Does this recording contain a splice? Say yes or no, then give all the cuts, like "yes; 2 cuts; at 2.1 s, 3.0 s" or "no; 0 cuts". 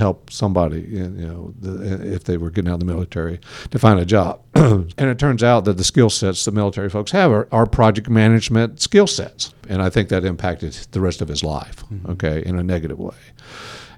yes; 2 cuts; at 4.9 s, 9.5 s